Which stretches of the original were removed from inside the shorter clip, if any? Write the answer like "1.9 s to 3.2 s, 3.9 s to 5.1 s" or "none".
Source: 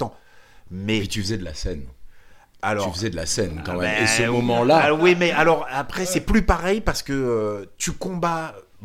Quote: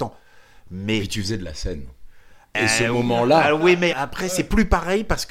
2.5 s to 3.9 s, 5.3 s to 5.7 s